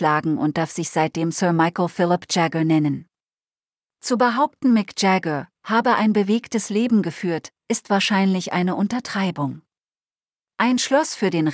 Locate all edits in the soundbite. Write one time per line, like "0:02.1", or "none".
none